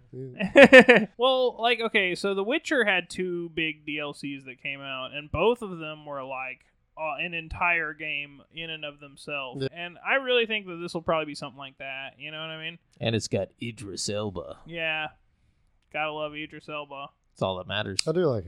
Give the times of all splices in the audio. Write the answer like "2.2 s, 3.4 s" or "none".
1.1 s, 9.7 s